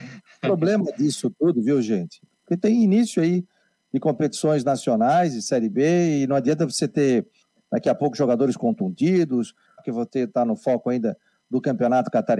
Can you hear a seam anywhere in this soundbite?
yes; 2 cuts; at 2.3 s, 9.8 s

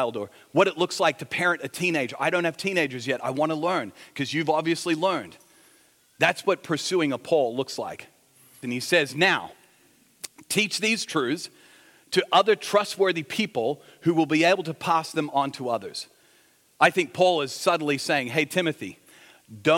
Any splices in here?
yes; 1 cut; at 8.6 s

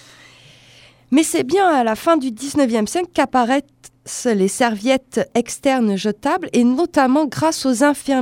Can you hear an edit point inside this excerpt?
no; 0 cuts

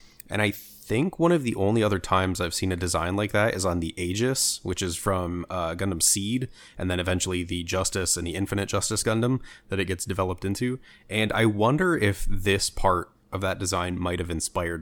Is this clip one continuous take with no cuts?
yes; 0 cuts

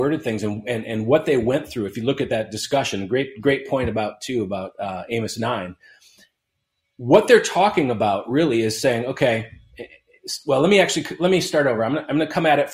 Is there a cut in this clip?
no; 0 cuts

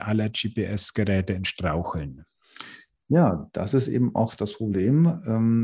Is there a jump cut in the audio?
no; 0 cuts

